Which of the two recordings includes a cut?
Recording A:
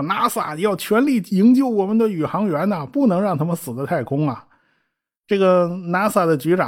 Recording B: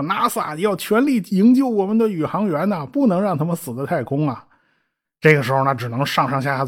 B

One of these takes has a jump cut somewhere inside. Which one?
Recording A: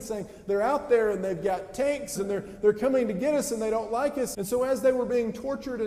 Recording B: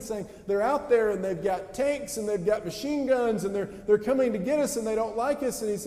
A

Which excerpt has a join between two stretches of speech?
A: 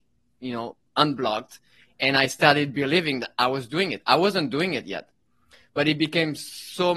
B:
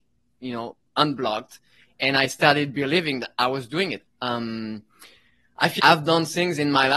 B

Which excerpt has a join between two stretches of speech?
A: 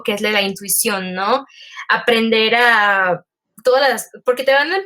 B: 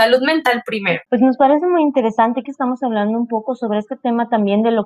B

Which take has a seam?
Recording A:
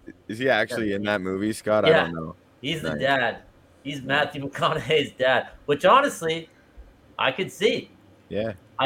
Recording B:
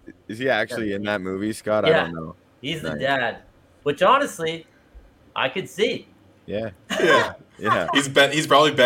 B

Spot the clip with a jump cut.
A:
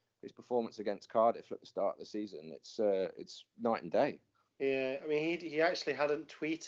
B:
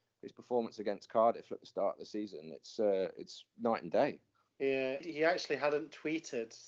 B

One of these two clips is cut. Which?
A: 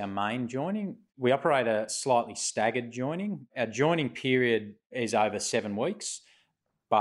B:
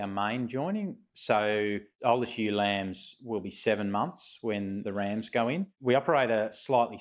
A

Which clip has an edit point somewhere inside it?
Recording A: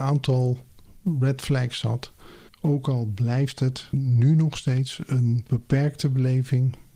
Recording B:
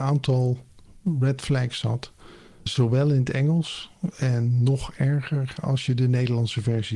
A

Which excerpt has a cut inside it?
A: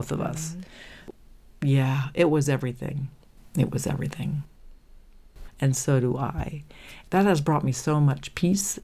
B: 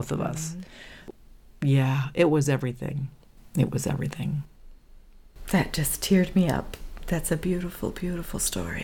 A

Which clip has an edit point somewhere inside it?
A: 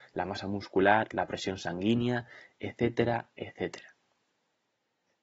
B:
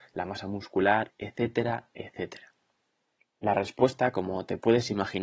B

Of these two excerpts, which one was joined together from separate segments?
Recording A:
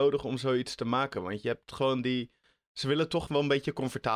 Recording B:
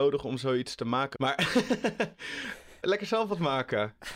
B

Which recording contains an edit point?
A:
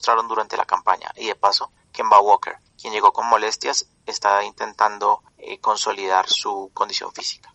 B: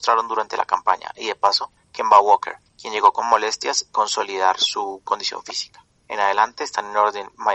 B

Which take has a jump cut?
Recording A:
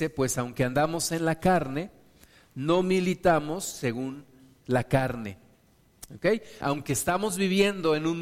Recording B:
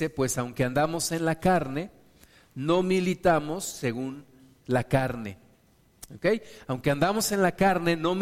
A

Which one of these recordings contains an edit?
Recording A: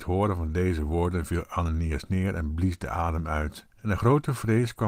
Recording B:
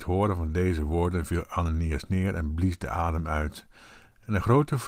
A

